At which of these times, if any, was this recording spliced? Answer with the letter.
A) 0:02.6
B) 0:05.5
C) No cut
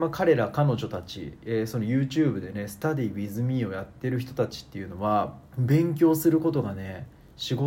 B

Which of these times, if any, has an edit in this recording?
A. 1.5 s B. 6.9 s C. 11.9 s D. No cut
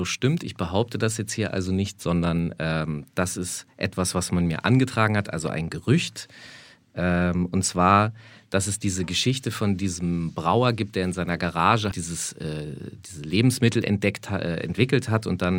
C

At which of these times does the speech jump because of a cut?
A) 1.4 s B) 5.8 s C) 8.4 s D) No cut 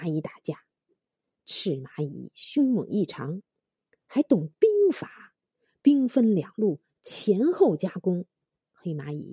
D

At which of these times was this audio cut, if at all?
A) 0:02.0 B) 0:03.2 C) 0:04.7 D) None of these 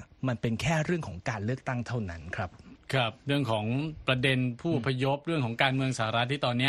B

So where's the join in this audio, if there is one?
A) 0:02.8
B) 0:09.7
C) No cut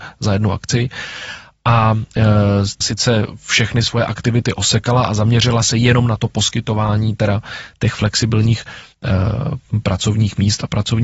A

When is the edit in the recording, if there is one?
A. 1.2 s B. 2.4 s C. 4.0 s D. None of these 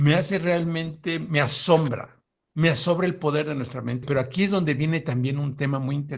C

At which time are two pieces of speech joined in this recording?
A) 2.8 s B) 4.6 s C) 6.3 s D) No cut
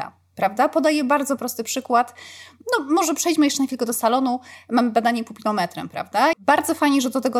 C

